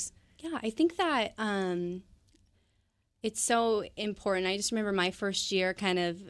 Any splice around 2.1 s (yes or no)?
no